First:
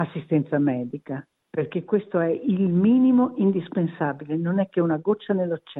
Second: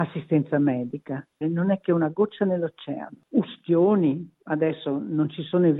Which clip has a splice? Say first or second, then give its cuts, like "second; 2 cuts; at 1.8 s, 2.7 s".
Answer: second; 1 cut; at 1.4 s